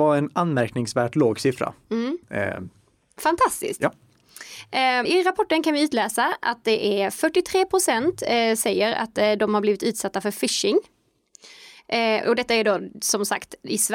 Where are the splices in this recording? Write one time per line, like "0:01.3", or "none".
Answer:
0:02.2
0:05.1